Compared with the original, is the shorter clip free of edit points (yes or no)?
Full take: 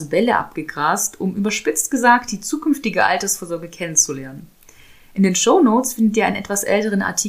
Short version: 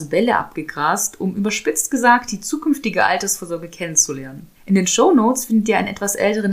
no